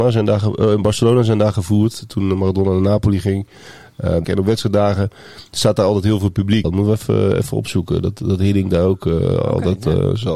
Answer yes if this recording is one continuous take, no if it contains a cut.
no